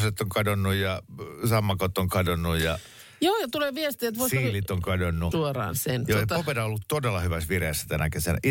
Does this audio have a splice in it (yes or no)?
yes